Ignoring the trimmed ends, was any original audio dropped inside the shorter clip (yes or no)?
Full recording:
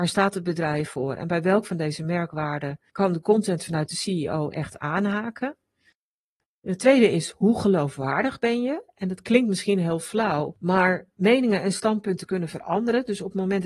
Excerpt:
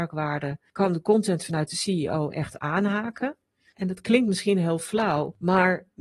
yes